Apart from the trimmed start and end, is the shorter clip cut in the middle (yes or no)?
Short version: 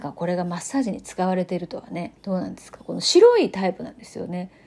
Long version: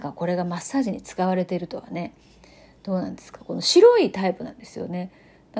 yes